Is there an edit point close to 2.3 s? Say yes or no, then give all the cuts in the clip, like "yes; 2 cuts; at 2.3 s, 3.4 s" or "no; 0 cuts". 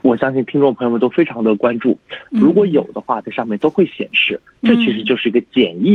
yes; 1 cut; at 2.3 s